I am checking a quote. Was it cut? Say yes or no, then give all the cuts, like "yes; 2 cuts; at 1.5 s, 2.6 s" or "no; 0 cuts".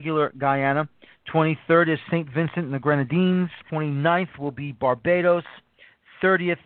yes; 1 cut; at 3.7 s